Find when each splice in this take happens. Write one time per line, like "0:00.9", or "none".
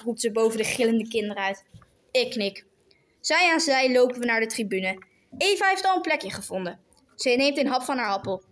none